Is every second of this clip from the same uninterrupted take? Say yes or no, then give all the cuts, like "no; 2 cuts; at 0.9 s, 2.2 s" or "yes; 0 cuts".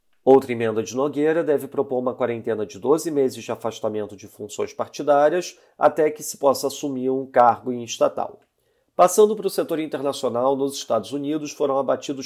yes; 0 cuts